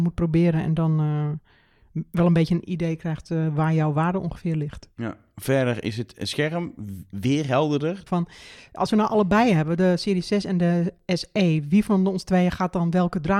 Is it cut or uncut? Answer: cut